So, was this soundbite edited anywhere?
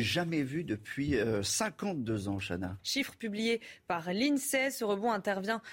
yes; 1 cut; at 2.8 s

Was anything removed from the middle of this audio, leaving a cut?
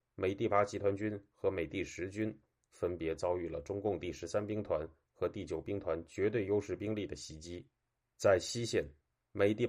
no; 0 cuts

